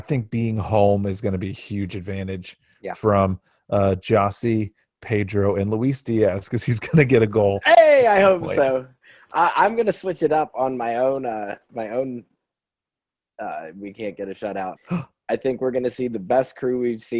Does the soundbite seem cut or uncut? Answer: cut